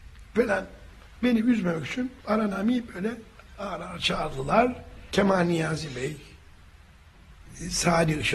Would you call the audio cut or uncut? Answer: cut